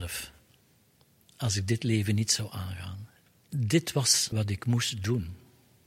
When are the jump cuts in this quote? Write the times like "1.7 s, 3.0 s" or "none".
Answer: 4.3 s